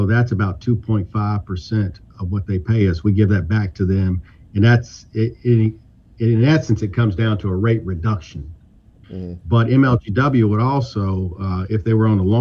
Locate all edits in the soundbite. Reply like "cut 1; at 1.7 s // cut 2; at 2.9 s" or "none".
cut 1; at 9.0 s

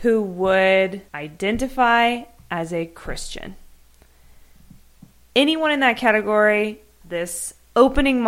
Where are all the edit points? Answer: cut 1; at 1.1 s // cut 2; at 7.0 s

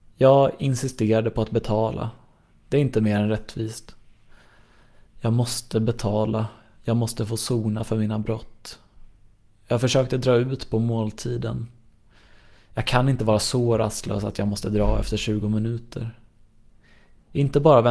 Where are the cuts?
none

